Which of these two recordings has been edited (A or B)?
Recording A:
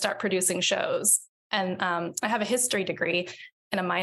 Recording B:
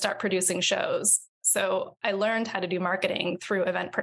A